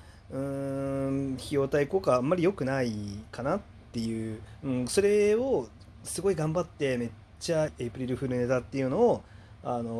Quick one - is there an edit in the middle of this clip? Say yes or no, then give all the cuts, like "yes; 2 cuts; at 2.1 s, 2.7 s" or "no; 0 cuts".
yes; 1 cut; at 7.7 s